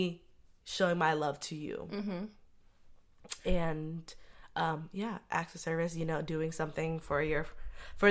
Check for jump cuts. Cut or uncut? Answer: uncut